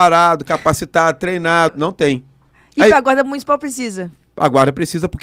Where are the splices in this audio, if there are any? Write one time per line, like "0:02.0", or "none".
0:01.7